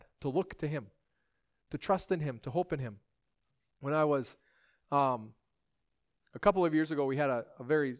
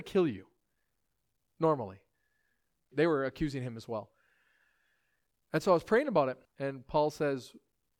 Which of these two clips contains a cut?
second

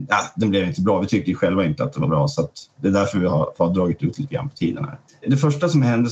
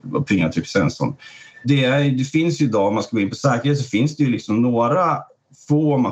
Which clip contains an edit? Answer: first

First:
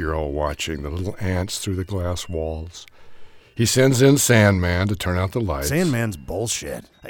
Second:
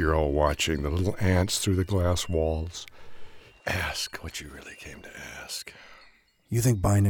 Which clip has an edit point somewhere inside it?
second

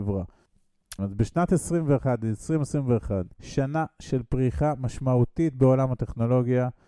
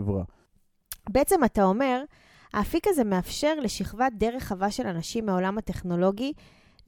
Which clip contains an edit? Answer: first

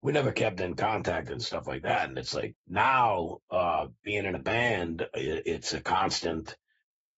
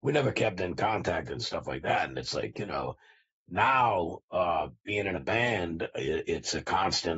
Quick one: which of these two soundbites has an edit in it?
first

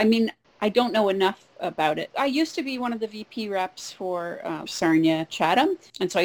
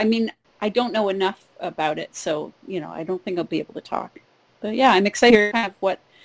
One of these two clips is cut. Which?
first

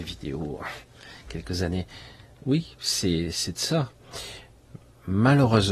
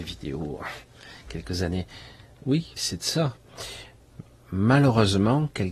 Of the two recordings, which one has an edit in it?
second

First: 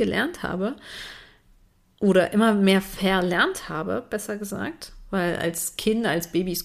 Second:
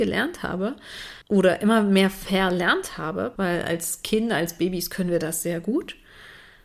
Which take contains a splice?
second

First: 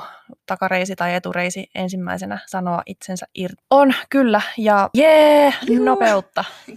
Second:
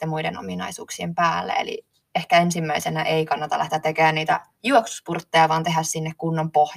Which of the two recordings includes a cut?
first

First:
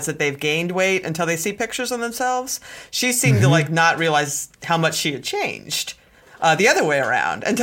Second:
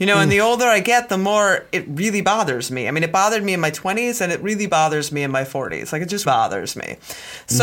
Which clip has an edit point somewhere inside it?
second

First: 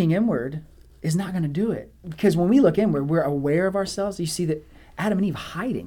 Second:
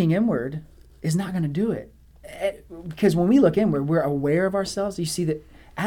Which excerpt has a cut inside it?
first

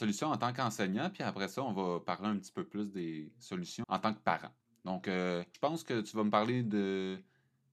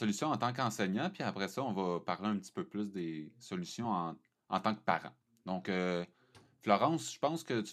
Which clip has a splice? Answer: first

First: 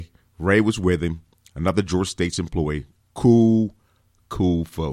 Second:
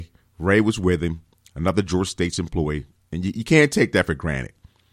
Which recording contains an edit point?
second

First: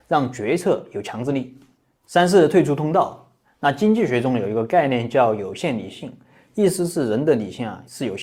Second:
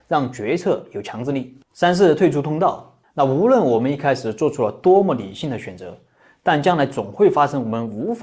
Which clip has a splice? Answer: second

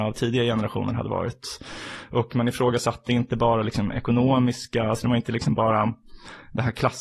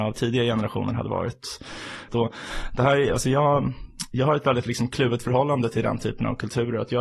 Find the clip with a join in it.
second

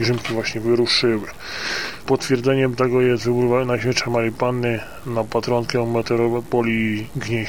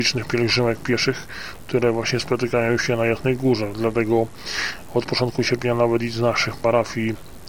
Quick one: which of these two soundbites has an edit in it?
first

